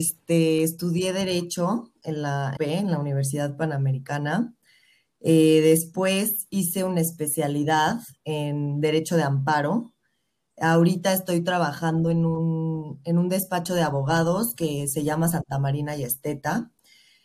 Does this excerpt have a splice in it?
yes; 1 cut; at 2.6 s

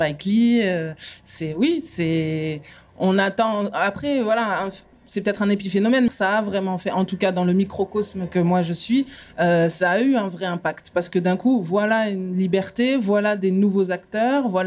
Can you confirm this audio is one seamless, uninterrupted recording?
no; 1 cut; at 6.1 s

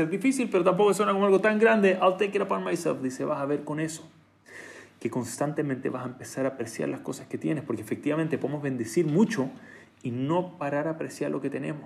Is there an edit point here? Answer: no; 0 cuts

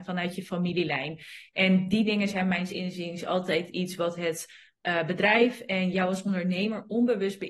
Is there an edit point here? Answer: no; 0 cuts

